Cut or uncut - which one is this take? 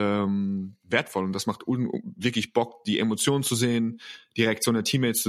uncut